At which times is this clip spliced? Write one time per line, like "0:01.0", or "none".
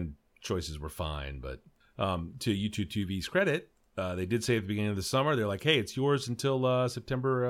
none